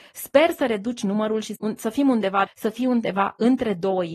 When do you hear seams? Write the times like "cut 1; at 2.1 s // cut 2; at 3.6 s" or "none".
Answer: cut 1; at 2.5 s